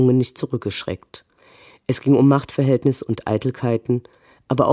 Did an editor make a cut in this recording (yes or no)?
no